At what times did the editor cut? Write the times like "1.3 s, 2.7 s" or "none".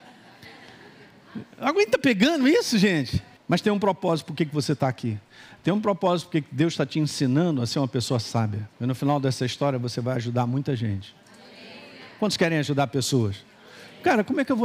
3.4 s, 8.7 s